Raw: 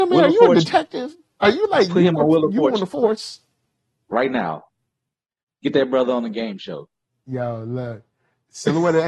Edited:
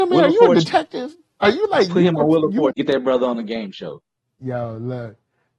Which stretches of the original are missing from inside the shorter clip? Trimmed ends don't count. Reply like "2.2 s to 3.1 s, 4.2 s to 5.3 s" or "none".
2.7 s to 5.6 s